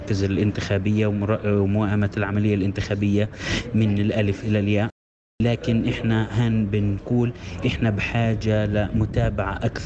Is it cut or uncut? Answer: uncut